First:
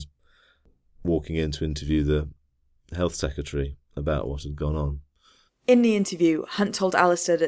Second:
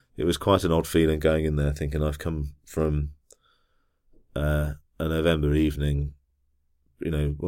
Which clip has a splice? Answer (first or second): first